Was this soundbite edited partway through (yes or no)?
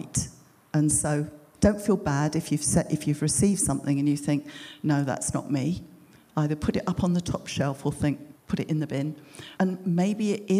yes